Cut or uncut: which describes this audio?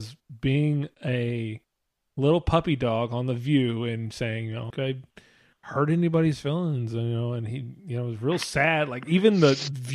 cut